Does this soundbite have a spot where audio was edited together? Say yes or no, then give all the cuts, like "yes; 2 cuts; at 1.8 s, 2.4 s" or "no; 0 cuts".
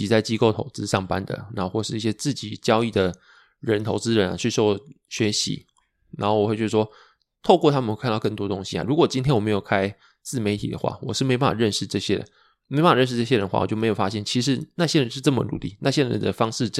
no; 0 cuts